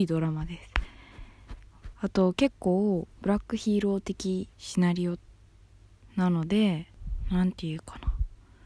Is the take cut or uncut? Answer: cut